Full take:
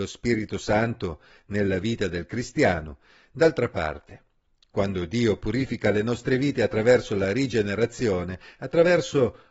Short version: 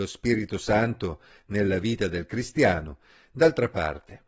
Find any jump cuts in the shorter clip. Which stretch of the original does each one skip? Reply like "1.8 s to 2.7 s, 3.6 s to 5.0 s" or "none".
none